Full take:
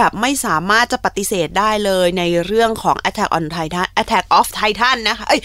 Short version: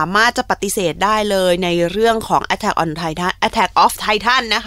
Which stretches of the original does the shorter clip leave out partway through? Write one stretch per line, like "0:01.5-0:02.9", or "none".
none